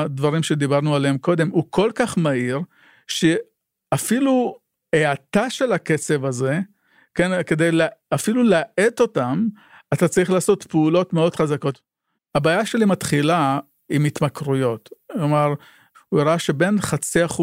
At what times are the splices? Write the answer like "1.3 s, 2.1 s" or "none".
12.2 s, 15.9 s